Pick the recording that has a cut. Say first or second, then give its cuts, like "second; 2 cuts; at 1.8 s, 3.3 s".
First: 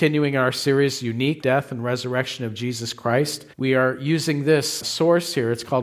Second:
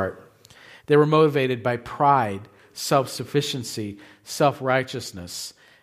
first; 3 cuts; at 1.4 s, 3.5 s, 4.8 s